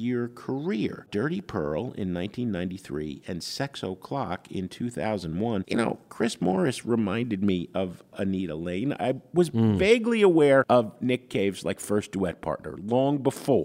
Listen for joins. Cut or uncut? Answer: uncut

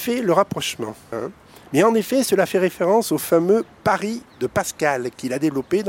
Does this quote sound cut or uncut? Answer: cut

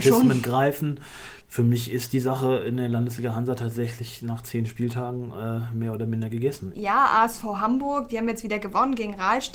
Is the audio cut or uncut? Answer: cut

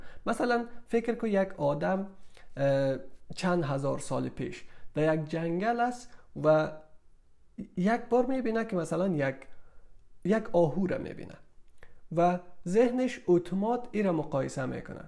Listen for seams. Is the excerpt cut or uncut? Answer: uncut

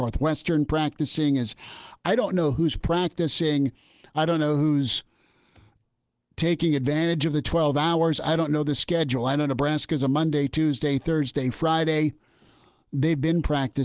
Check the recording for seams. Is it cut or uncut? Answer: uncut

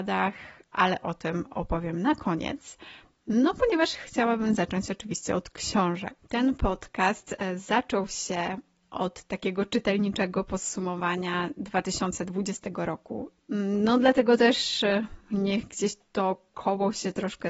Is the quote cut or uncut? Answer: cut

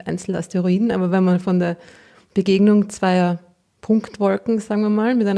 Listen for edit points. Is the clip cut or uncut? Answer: uncut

